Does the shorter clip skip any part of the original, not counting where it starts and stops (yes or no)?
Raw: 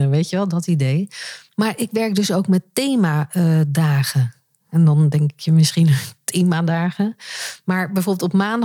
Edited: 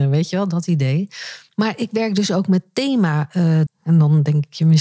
yes